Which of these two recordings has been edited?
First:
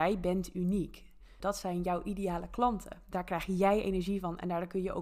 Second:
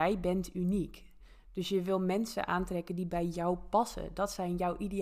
first; 1 cut; at 1.4 s

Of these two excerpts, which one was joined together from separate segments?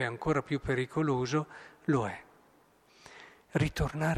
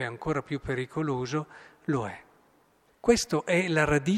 second; 1 cut; at 2.9 s

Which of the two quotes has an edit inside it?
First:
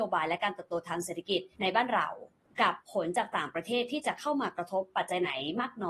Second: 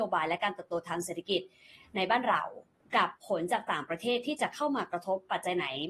first; 1 cut; at 1.5 s

